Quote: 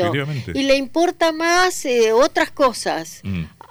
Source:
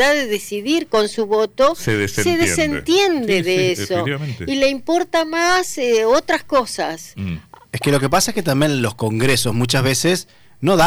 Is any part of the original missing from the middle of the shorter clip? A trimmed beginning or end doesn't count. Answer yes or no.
no